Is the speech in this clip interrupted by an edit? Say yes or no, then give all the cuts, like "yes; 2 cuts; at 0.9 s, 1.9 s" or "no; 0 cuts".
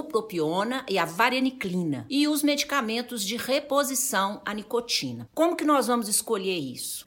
no; 0 cuts